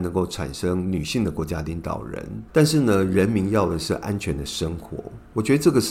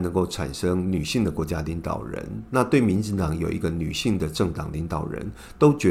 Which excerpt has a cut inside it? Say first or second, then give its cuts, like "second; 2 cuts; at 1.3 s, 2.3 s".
first; 1 cut; at 2.5 s